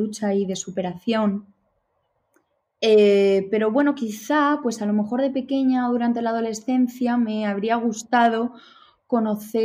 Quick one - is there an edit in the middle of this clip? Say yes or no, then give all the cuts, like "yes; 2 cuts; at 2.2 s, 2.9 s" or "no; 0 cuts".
no; 0 cuts